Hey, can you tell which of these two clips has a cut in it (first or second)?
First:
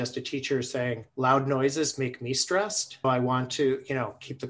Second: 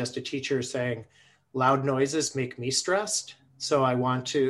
first